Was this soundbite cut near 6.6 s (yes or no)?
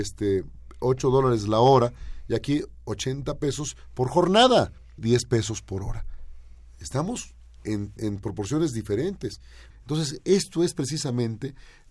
no